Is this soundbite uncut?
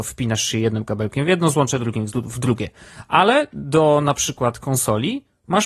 no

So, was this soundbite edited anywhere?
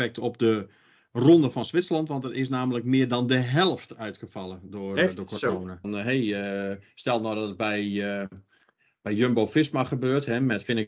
yes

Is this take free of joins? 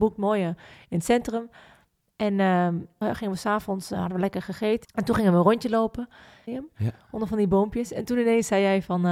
no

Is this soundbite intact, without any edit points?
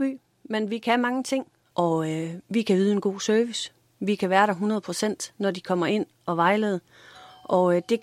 no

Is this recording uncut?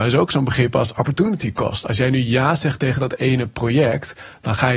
yes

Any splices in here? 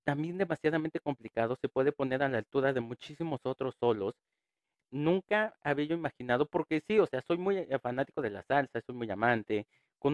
yes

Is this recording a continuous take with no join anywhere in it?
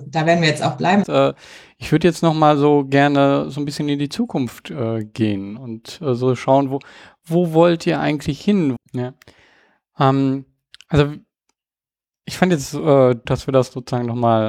no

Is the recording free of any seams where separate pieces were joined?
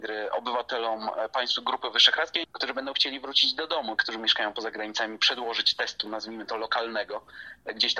no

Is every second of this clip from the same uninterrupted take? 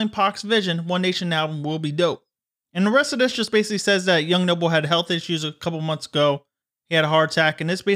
yes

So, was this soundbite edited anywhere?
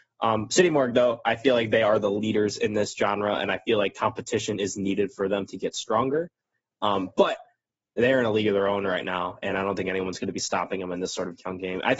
no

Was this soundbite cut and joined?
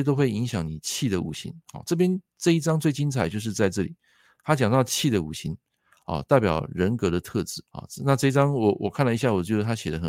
yes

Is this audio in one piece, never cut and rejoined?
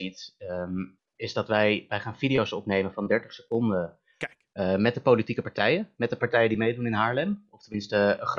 yes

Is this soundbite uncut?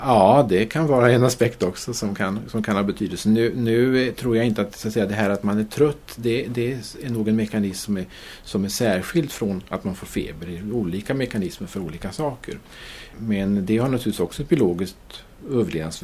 yes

